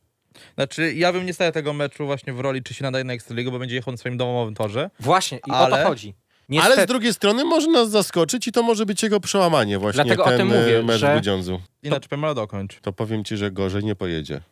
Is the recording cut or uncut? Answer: cut